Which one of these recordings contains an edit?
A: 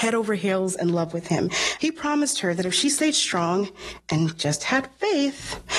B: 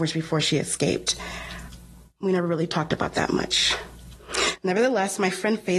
A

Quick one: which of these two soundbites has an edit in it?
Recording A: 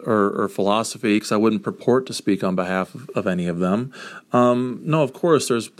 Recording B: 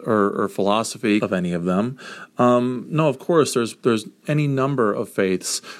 B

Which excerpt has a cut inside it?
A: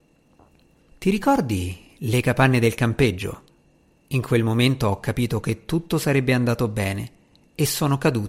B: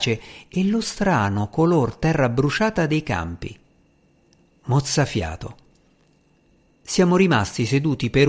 A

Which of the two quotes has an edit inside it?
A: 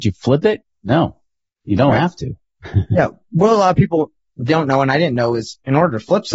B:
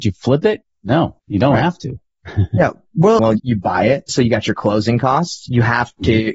B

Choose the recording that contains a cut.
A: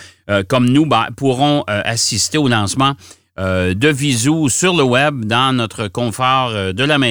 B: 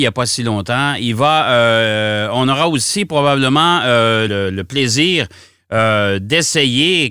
B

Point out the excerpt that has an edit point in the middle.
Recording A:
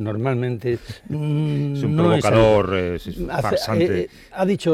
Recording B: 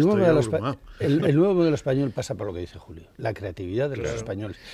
B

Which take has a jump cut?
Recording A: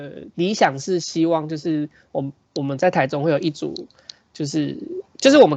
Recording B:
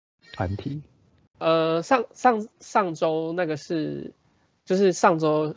B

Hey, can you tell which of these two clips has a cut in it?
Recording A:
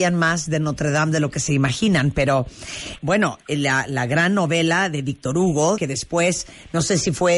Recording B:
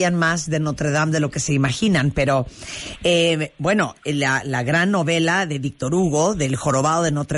A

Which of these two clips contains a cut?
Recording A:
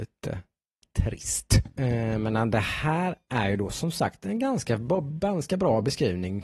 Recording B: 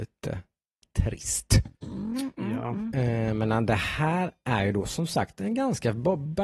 A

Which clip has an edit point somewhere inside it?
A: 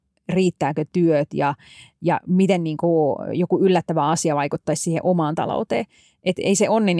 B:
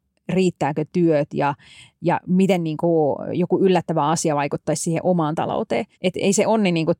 B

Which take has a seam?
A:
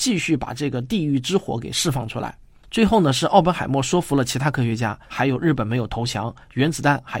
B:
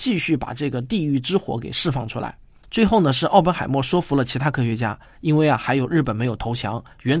A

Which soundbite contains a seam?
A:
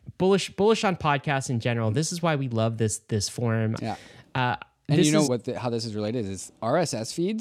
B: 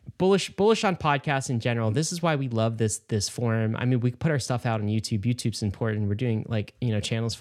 A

